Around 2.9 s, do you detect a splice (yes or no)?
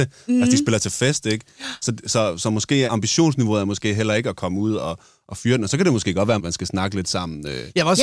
yes